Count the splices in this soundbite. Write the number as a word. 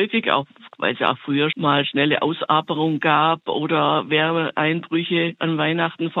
one